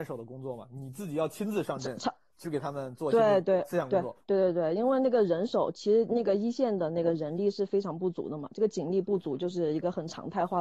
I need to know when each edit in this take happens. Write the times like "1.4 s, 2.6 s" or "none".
none